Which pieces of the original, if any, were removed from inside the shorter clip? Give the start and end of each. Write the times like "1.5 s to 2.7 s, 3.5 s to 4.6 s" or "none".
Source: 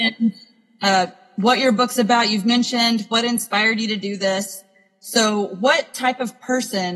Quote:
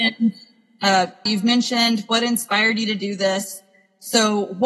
1.3 s to 2.3 s

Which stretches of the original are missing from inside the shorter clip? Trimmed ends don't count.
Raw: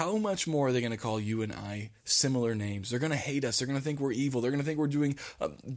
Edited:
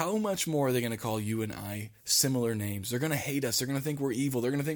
none

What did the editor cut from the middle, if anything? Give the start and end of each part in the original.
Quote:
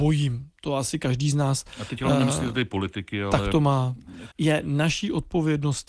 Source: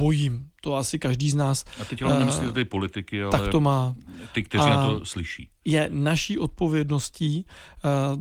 4.3 s to 5.6 s

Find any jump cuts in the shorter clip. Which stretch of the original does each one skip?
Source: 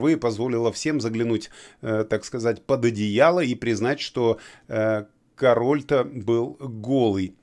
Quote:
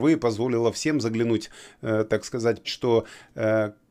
2.6 s to 4.0 s

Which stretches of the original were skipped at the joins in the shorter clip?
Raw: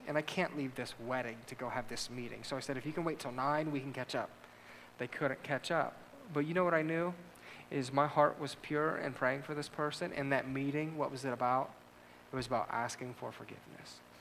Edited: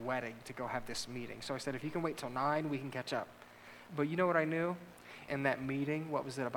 4.9 s to 6.3 s, 7.7 s to 10.1 s

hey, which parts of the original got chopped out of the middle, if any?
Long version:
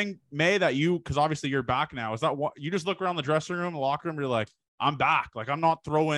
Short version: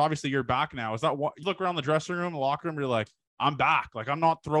2.6 s to 2.8 s

